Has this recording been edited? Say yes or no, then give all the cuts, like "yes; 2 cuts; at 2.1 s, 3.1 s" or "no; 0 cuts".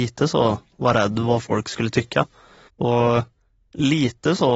yes; 1 cut; at 2.7 s